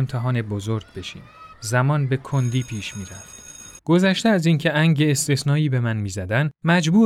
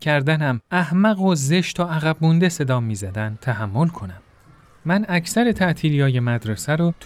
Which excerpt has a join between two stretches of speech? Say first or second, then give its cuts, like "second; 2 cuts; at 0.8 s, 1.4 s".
first; 2 cuts; at 1.5 s, 3.8 s